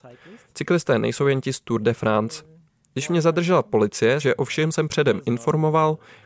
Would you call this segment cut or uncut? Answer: cut